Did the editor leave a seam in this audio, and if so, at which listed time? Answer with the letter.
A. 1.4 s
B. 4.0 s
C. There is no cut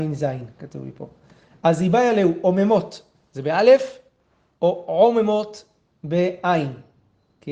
C